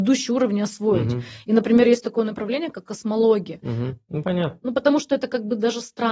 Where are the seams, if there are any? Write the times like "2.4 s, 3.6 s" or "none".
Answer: 4.1 s